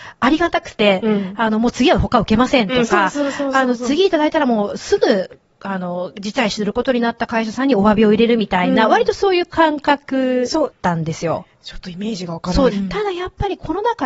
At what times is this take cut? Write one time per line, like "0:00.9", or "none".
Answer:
0:10.7
0:12.7

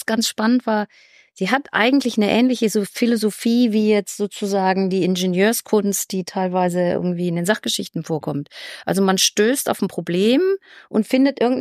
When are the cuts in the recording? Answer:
none

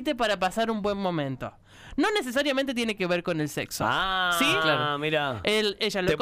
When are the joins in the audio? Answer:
none

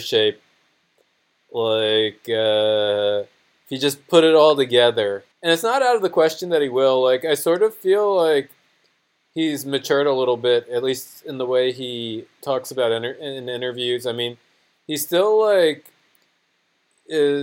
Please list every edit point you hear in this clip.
0:05.3

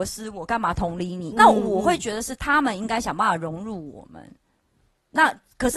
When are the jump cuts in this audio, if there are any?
0:01.3

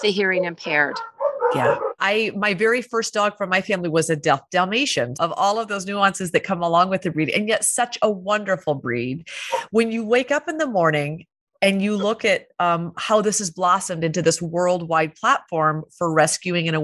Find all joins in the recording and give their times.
0:02.0
0:05.1

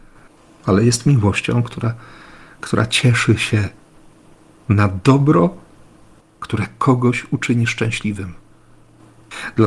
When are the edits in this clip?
0:06.2

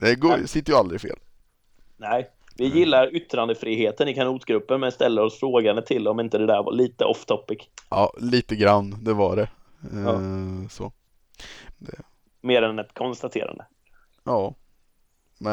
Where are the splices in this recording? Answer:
0:11.7

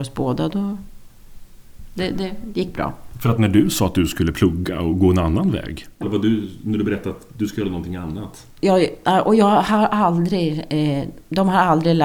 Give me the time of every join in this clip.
0:06.0

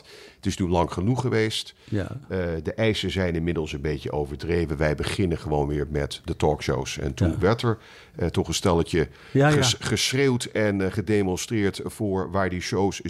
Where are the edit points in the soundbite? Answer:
none

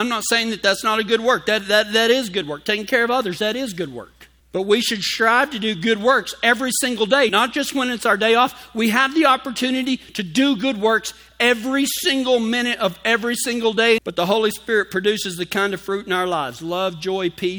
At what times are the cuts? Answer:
0:07.3
0:14.0

